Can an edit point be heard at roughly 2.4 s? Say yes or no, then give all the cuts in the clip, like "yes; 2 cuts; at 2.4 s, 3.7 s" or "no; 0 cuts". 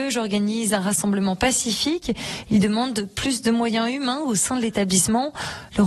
no; 0 cuts